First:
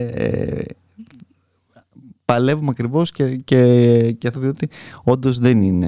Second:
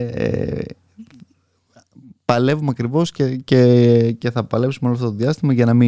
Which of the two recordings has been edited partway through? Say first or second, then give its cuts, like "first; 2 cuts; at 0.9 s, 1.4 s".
first; 1 cut; at 4.3 s